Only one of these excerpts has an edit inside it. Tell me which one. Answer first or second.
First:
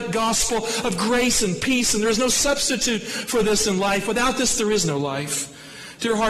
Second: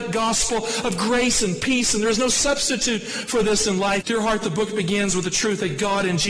second